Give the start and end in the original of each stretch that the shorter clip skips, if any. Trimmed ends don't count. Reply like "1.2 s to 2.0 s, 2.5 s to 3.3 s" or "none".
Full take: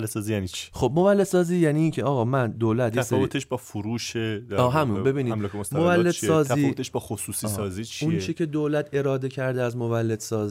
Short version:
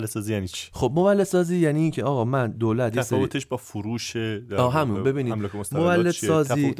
none